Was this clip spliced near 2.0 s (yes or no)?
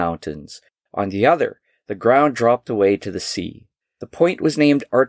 no